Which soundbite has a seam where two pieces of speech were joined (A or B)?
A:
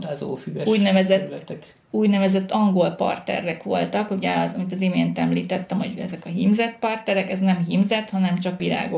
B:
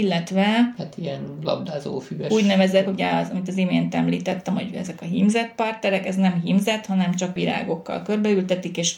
B